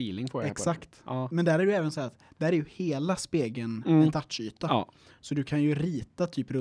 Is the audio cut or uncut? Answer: uncut